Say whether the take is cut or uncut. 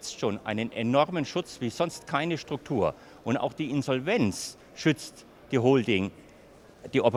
uncut